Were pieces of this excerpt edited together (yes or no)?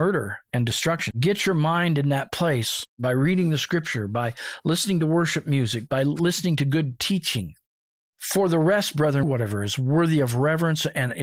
yes